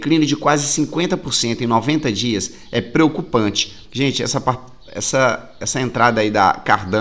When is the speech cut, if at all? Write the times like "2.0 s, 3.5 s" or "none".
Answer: 3.8 s

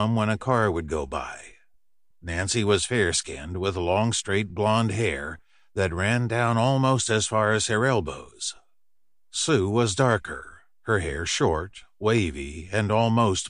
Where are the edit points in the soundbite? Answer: 2.1 s

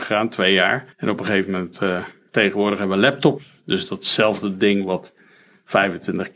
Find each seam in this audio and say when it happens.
0.9 s, 2.3 s

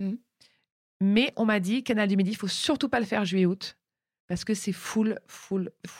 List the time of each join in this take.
none

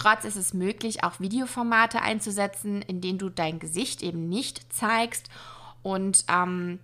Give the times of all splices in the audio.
none

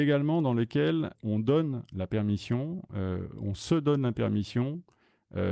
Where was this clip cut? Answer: 1.1 s

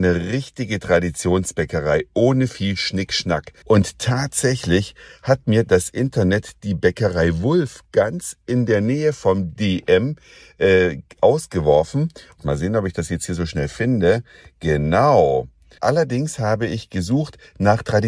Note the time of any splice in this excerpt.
3.6 s, 12.4 s, 15.8 s

